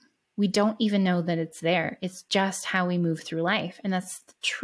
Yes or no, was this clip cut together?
no